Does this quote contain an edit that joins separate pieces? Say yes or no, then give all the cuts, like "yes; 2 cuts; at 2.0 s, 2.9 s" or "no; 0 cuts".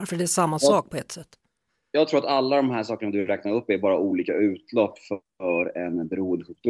no; 0 cuts